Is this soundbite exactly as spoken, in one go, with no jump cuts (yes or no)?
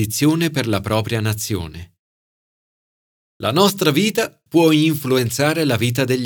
yes